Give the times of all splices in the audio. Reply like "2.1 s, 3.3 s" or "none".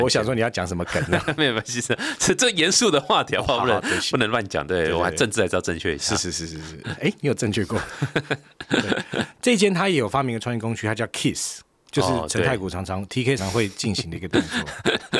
9.3 s, 13.4 s